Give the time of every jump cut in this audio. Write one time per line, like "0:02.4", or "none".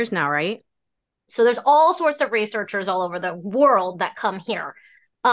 0:01.3